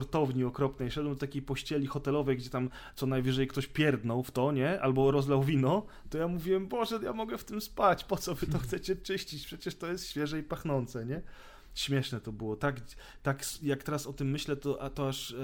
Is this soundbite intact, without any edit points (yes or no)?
yes